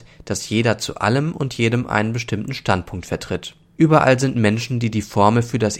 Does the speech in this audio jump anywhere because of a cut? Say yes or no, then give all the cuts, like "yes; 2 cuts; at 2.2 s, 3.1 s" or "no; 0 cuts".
yes; 1 cut; at 3.8 s